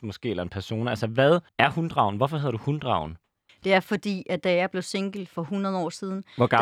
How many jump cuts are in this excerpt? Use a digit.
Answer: 2